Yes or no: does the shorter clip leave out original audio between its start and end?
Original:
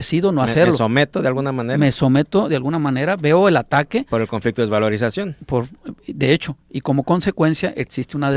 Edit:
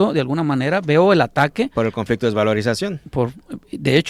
no